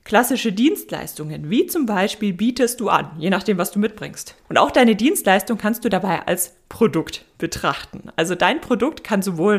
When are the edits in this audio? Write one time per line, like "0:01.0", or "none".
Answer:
0:04.4